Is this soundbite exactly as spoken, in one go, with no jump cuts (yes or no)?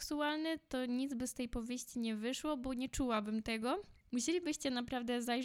no